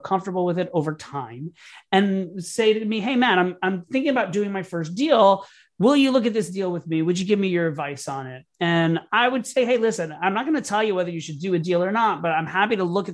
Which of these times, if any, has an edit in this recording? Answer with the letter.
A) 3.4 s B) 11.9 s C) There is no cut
C